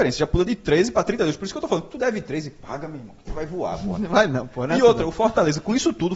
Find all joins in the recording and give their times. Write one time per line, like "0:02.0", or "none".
none